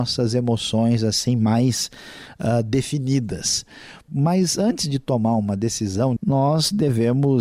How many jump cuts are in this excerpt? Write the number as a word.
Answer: two